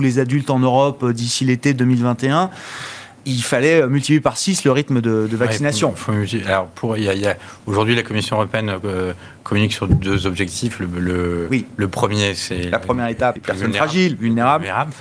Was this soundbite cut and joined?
yes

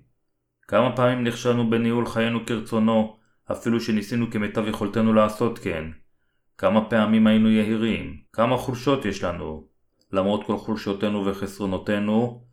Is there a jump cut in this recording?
yes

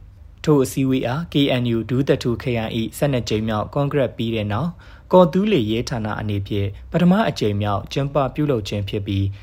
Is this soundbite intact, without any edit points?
yes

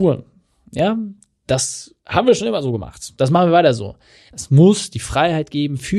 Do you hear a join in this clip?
yes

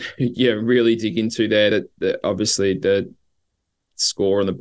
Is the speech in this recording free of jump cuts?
yes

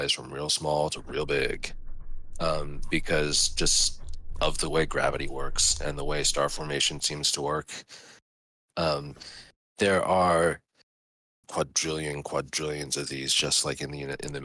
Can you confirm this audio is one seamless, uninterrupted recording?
no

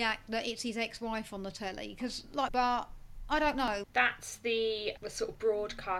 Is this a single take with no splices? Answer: no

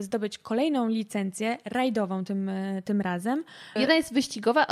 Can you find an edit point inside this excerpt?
no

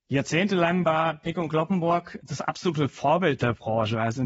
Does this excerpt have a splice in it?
no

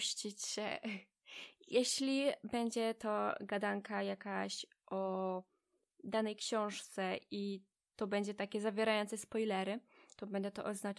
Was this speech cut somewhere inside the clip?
no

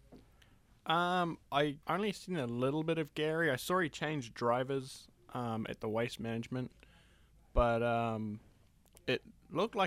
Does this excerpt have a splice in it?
yes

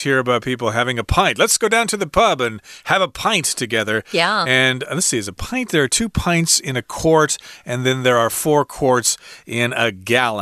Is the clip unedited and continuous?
yes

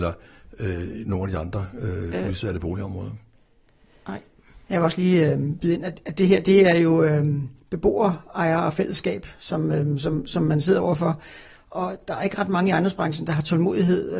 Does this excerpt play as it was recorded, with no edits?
yes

